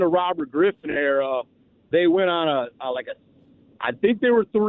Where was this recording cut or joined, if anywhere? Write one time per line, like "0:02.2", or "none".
none